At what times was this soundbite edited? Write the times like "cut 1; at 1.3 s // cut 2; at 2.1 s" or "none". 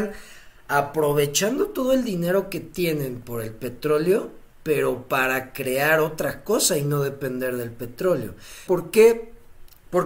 cut 1; at 8.7 s

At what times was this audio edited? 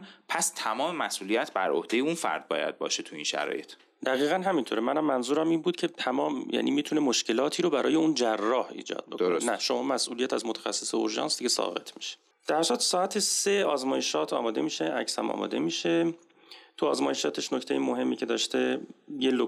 none

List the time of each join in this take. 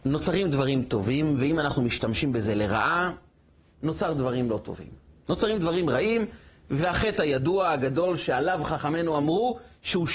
none

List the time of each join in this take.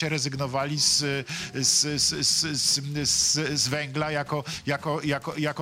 none

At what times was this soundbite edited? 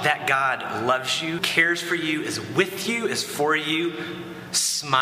cut 1; at 1.4 s

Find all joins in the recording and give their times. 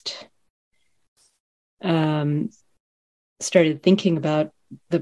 none

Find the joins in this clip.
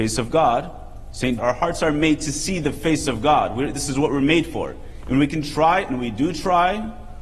cut 1; at 1.4 s // cut 2; at 5.0 s

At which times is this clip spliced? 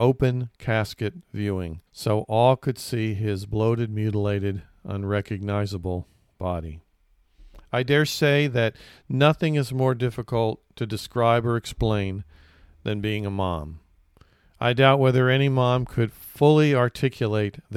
cut 1; at 1.9 s

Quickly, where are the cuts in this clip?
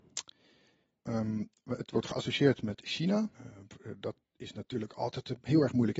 cut 1; at 1.0 s // cut 2; at 3.3 s

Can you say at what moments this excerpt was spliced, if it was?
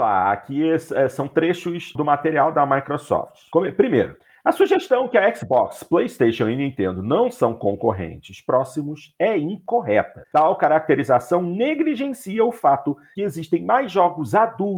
cut 1; at 2.0 s // cut 2; at 10.3 s

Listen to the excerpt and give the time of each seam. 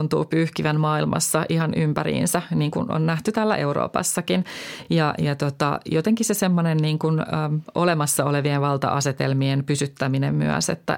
none

